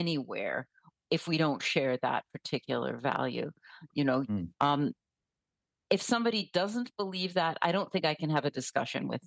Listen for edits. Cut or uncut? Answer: cut